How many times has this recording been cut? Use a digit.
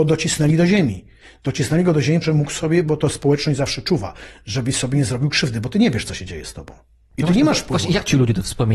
1